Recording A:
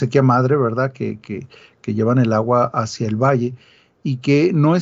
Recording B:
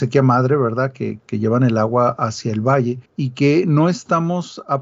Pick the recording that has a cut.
B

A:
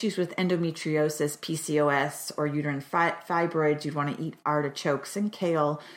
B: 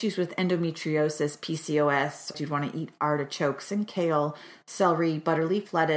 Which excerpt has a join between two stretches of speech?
B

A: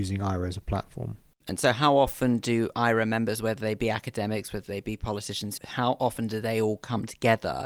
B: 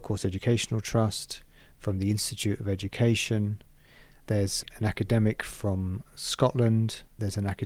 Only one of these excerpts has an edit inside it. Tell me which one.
A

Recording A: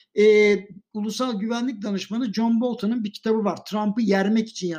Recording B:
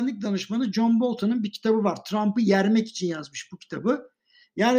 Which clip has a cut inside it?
A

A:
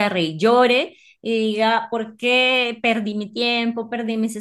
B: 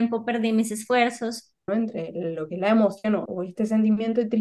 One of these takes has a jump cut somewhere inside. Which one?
B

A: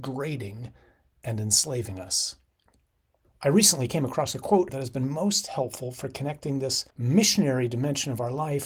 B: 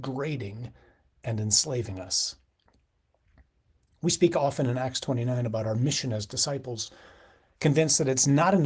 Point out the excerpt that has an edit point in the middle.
A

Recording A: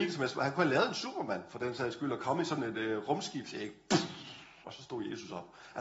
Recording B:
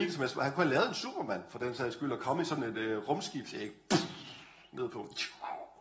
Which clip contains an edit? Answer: A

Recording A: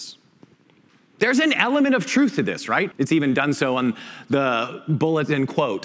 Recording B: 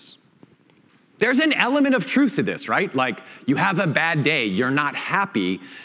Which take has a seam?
A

